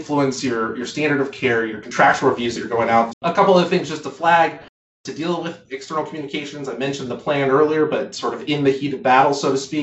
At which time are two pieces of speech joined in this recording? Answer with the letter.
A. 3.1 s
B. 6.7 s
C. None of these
A